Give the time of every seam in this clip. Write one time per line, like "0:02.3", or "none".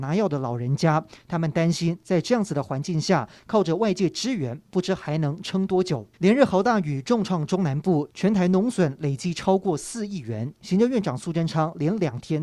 0:06.1